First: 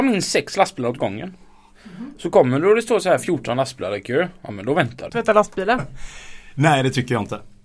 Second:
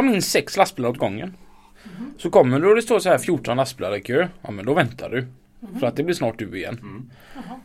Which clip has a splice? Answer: first; 1 cut; at 5.1 s

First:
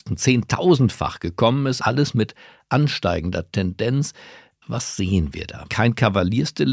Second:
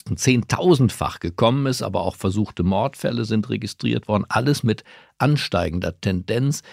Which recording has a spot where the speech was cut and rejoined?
first; 2 cuts; at 1.8 s, 5.7 s

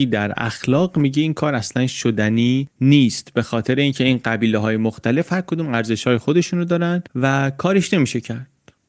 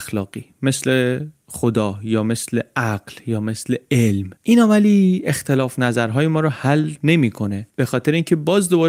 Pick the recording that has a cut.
second; 1 cut; at 4.4 s

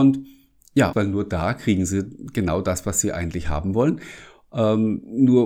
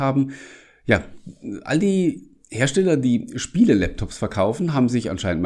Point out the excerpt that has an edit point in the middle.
first; 1 cut; at 0.9 s

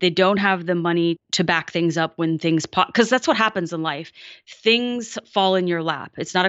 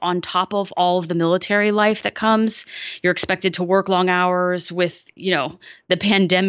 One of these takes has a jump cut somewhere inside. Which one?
first; 1 cut; at 1.2 s

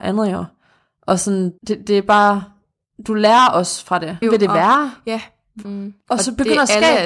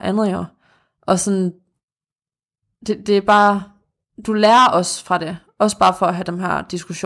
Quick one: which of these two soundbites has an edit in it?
first; 3 cuts; at 1.6 s, 4.2 s, 5.6 s

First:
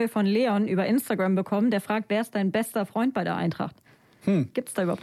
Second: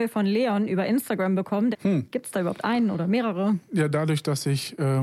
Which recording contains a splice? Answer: second; 1 cut; at 1.7 s

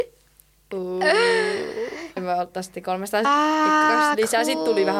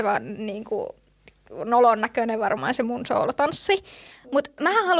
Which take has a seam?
first; 2 cuts; at 2.2 s, 3.2 s

